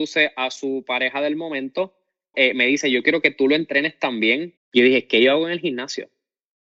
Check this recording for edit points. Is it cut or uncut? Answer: cut